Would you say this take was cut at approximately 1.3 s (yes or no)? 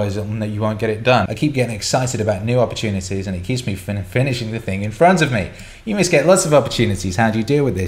yes